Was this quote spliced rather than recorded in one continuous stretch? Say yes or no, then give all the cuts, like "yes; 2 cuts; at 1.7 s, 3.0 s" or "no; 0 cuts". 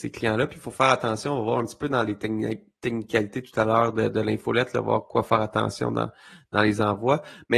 no; 0 cuts